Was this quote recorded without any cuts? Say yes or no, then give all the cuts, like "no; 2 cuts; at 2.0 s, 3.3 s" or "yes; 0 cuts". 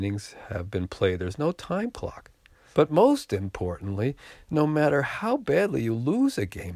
no; 1 cut; at 2.7 s